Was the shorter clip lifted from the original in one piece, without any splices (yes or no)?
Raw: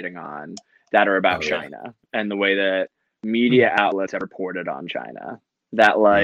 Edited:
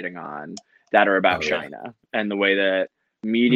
yes